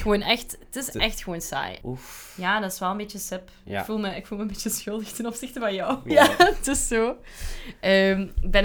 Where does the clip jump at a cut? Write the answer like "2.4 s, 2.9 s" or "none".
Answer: 1.8 s, 6.1 s